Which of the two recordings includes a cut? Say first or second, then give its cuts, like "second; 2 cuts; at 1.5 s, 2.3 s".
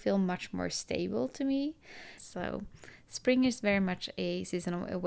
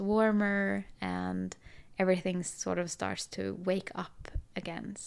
first; 1 cut; at 2.2 s